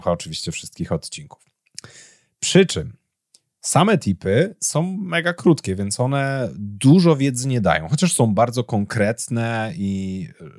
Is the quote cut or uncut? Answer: uncut